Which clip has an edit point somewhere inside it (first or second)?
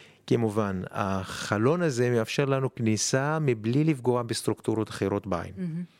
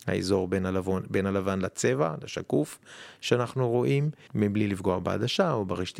second